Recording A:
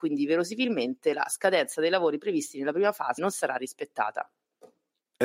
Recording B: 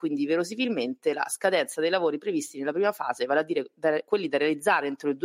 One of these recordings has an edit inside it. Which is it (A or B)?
A